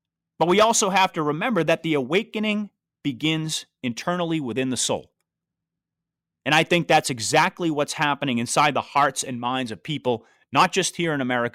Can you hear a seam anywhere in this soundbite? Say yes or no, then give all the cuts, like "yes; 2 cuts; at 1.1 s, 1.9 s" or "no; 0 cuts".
no; 0 cuts